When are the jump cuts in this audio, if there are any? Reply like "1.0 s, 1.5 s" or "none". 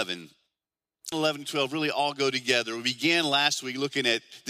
1.1 s